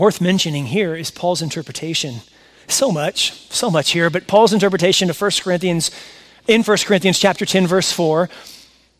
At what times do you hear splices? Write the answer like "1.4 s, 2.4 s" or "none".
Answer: none